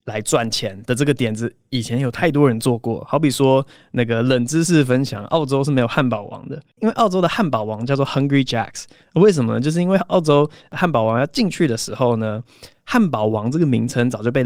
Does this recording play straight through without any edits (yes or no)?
yes